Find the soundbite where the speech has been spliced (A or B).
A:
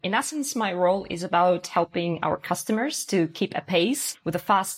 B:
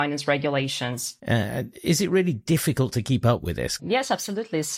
B